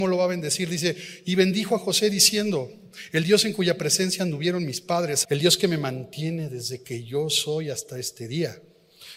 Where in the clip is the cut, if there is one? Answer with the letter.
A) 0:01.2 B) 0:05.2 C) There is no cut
B